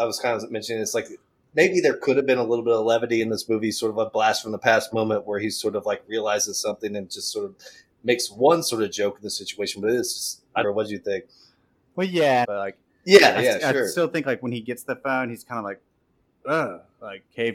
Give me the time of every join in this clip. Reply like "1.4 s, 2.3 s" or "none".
10.6 s, 12.4 s